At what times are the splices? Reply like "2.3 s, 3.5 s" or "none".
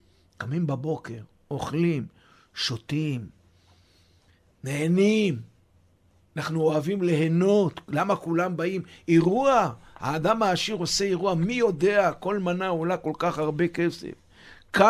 none